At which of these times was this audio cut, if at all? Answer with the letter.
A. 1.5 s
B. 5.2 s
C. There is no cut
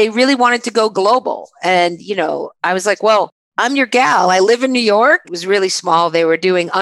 B